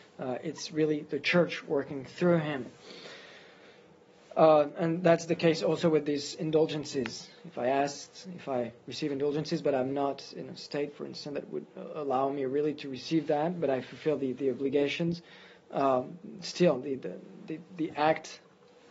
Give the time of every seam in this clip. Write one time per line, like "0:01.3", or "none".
none